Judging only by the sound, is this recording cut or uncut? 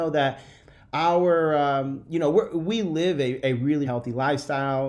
cut